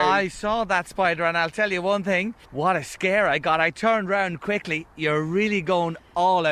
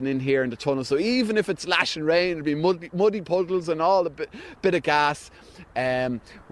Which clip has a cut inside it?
first; 1 cut; at 2.4 s

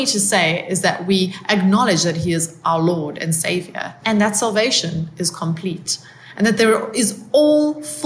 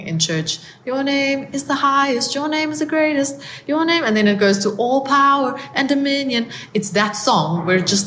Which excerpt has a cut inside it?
first; 1 cut; at 4.0 s

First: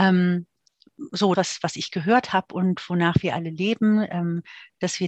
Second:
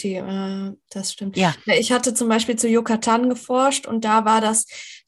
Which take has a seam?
first; 1 cut; at 1.4 s

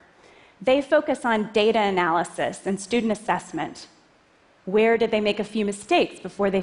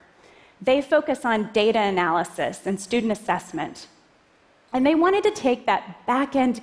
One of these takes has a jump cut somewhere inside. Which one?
first; 1 cut; at 4.6 s

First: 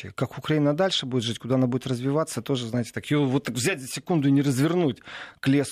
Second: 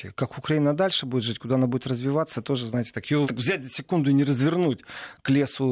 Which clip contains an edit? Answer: second; 1 cut; at 3.2 s

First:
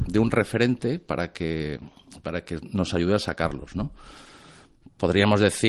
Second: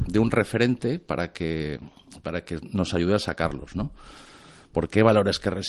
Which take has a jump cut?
second; 1 cut; at 4.7 s

